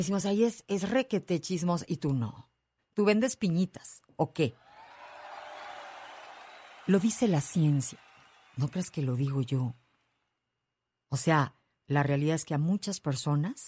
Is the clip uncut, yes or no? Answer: no